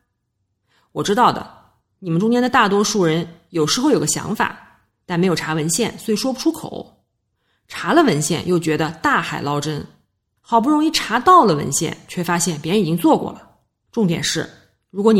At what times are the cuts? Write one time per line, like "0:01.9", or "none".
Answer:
none